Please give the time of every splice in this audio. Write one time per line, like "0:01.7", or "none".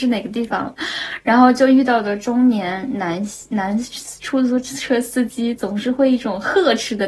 none